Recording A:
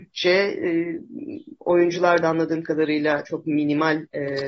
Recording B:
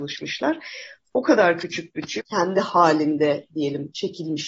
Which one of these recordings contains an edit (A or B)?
B